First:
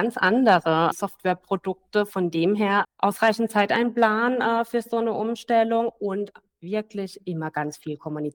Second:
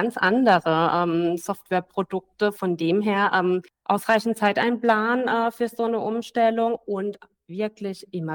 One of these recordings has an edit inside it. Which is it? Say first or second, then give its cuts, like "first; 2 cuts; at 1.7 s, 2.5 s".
first; 2 cuts; at 0.9 s, 2.8 s